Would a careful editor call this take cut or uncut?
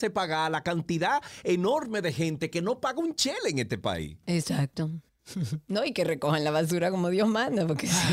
cut